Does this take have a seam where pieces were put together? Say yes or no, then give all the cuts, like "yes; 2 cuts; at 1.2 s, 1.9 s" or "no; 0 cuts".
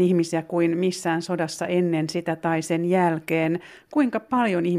no; 0 cuts